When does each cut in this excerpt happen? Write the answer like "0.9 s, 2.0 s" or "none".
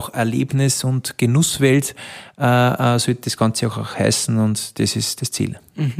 none